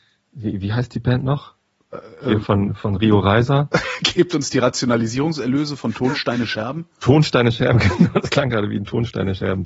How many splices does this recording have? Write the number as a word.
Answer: zero